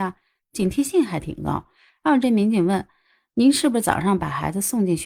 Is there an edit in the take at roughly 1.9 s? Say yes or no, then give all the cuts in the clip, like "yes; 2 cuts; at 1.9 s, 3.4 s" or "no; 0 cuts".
no; 0 cuts